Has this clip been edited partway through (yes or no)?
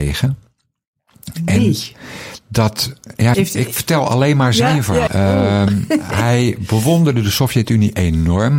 yes